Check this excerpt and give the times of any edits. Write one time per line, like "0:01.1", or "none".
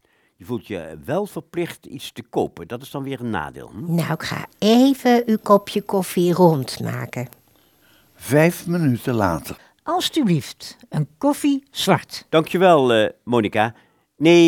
none

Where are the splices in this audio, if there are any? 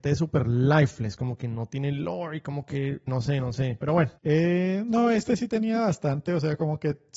0:03.1
0:04.2

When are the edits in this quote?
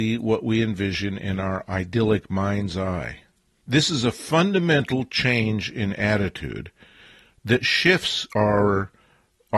0:03.5

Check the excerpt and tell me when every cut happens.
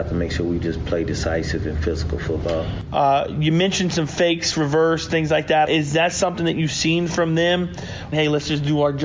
0:02.9
0:05.6
0:08.1

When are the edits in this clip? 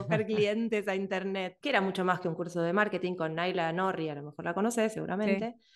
0:01.6

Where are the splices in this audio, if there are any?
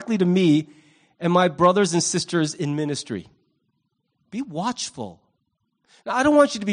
0:04.1

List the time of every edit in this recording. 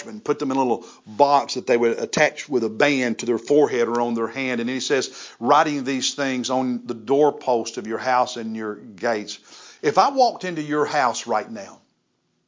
none

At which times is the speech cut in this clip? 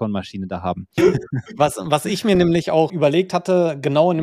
0:01.0
0:02.9

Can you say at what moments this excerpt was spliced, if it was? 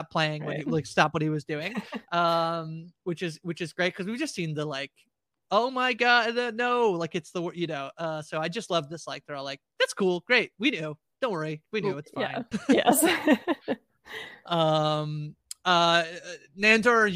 0:12.5

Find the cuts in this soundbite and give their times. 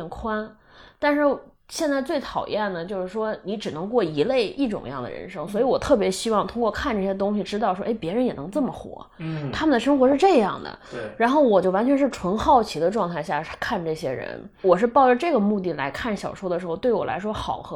none

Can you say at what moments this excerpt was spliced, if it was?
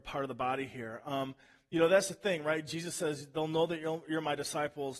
none

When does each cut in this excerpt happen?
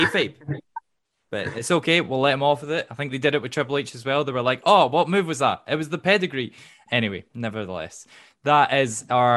none

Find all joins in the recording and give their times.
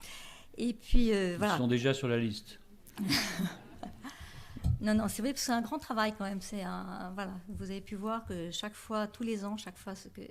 none

